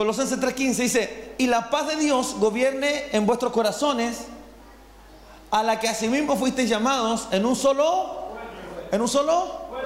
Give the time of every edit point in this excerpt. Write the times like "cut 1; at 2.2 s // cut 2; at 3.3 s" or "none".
none